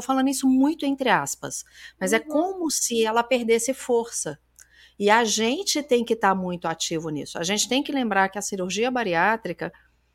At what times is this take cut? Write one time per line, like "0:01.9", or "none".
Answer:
none

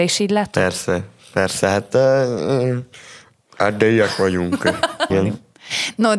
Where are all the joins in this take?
0:05.1

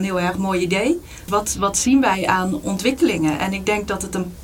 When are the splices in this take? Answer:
0:01.3

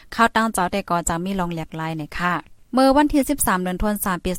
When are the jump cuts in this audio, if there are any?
0:02.6

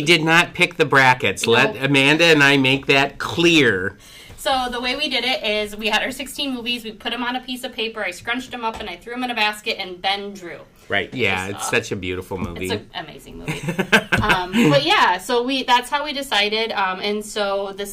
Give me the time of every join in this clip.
0:11.1

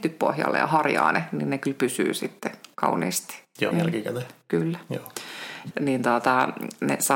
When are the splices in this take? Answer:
0:03.7
0:05.7

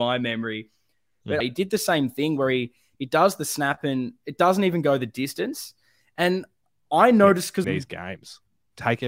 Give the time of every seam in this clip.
0:01.4
0:07.6

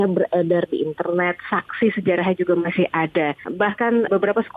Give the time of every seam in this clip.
none

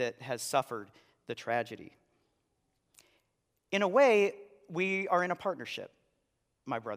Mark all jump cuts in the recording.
none

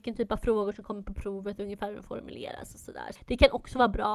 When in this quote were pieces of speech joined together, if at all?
0:03.2

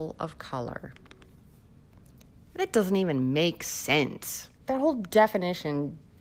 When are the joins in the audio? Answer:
0:04.6

